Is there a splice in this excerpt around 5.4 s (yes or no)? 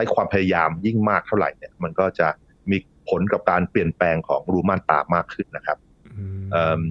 yes